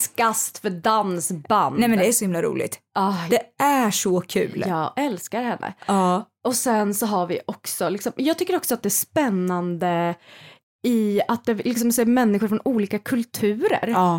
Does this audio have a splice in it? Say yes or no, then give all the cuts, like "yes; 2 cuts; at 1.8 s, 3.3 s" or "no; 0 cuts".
no; 0 cuts